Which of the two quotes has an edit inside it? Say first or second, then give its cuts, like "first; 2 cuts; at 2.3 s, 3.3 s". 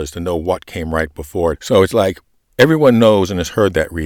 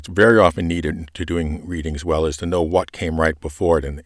first; 1 cut; at 1.5 s